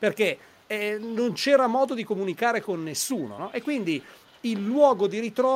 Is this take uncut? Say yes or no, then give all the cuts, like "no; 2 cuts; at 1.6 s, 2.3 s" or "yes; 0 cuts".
yes; 0 cuts